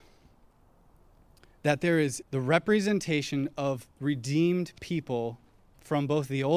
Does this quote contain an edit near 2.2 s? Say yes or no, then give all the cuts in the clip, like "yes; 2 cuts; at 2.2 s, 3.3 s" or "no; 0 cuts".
yes; 1 cut; at 2.2 s